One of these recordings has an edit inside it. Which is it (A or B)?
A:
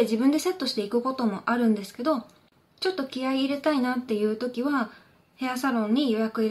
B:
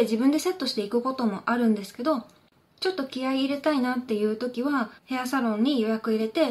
B